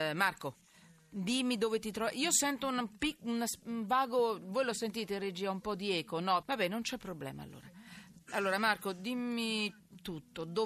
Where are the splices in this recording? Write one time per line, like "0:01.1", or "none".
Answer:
0:06.4